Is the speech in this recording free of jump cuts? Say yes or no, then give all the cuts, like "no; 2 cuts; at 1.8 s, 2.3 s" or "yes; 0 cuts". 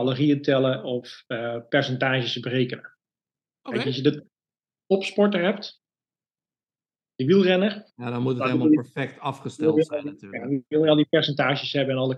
yes; 0 cuts